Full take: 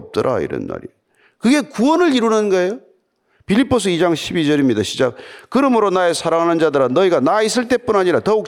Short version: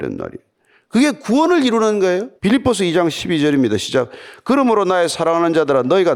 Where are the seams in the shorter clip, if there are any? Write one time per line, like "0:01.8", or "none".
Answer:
0:02.4